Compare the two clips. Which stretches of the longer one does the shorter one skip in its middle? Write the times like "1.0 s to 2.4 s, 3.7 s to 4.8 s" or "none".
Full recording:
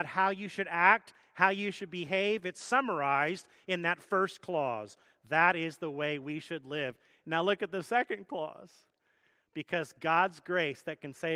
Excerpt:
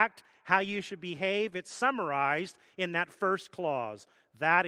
none